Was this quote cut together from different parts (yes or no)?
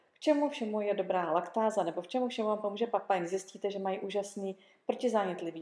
no